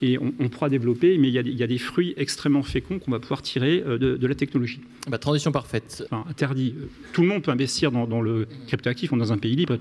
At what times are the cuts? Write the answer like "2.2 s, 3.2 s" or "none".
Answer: 6.1 s